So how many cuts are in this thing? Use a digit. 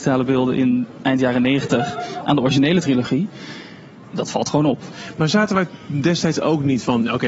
0